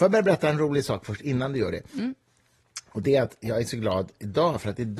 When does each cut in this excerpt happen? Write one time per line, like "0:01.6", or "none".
none